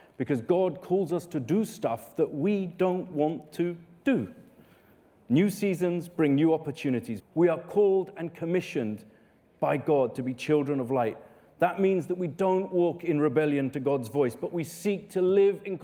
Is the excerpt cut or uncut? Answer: cut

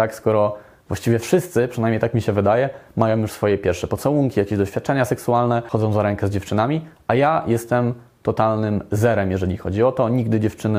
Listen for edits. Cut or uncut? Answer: uncut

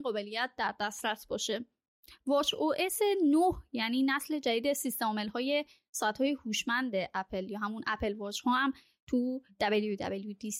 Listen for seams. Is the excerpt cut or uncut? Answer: uncut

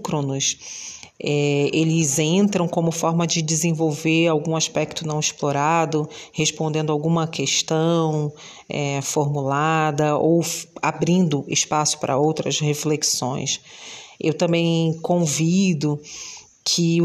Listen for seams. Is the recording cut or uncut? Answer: uncut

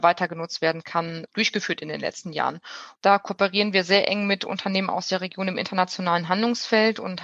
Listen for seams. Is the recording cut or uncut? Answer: cut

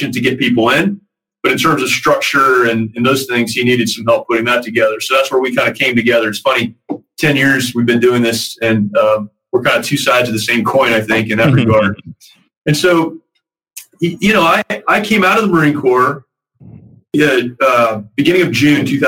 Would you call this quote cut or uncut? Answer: uncut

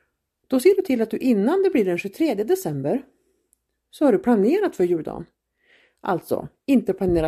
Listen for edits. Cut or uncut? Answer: uncut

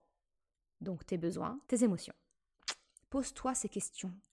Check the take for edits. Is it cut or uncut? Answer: cut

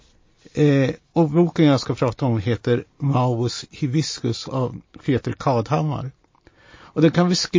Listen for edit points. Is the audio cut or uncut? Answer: uncut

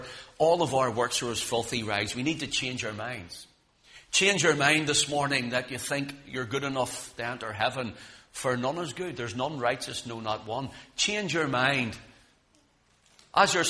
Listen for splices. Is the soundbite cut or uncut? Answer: uncut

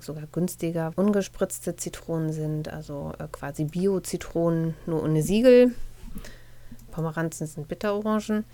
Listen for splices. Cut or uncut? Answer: cut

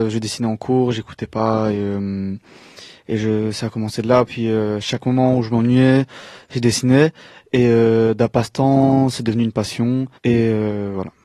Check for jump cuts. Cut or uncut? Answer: cut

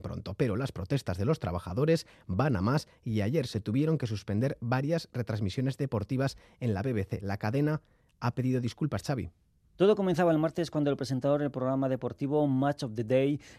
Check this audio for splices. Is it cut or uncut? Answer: uncut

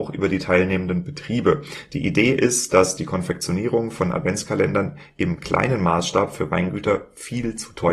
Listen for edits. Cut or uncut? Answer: uncut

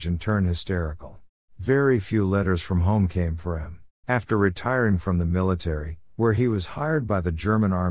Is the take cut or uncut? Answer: cut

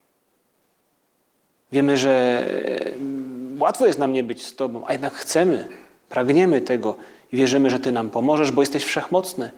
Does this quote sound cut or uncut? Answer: uncut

